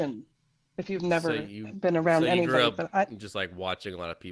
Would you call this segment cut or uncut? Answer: uncut